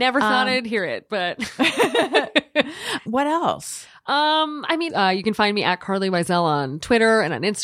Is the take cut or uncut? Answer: cut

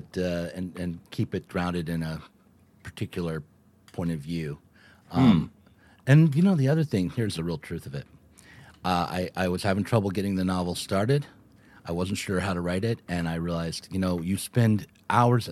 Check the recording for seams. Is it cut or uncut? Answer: uncut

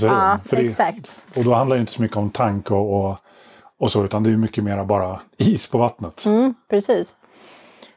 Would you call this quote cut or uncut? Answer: uncut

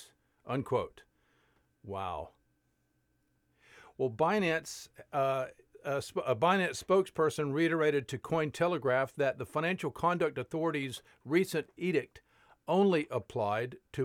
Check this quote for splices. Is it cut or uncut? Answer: uncut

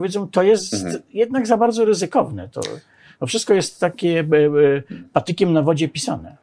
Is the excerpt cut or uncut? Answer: uncut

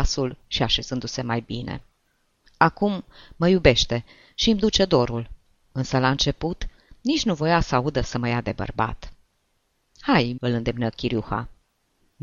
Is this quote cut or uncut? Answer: cut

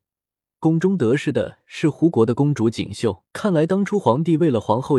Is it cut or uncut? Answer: cut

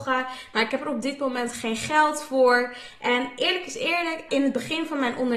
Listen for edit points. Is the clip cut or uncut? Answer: cut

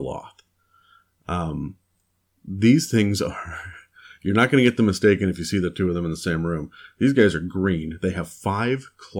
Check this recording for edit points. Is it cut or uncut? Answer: uncut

